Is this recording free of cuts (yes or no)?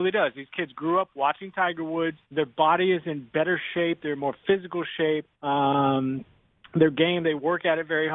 no